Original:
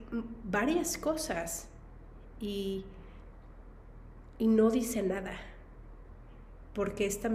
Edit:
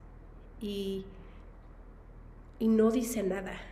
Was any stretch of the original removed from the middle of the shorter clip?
no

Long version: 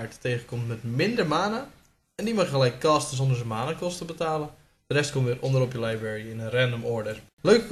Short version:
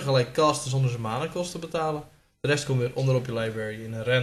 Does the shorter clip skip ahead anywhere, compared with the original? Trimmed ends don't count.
no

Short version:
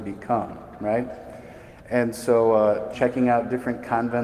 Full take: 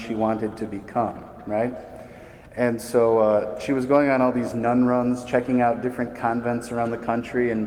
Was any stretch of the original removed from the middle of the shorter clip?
yes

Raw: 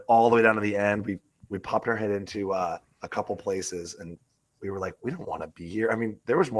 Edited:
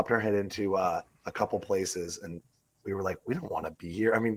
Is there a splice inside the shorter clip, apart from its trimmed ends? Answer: no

